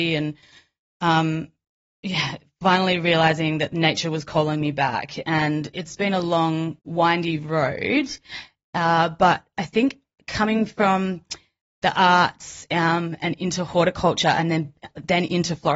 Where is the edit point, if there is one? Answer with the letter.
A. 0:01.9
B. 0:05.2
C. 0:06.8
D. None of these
C